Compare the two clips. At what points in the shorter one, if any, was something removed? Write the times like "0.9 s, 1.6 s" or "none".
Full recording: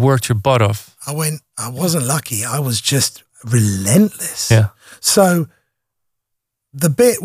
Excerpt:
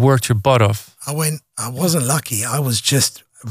none